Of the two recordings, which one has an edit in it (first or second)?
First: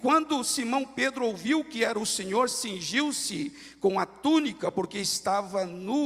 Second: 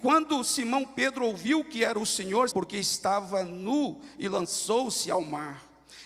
second